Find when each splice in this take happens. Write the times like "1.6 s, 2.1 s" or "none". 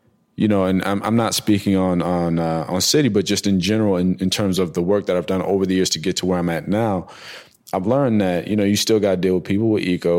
none